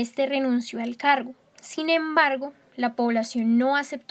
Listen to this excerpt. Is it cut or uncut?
uncut